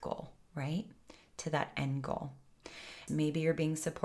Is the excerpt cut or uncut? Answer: cut